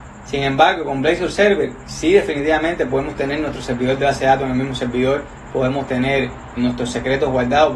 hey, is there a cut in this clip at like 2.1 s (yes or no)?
no